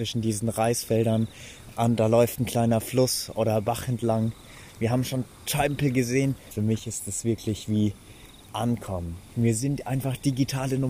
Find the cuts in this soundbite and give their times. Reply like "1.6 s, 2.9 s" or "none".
6.5 s, 9.3 s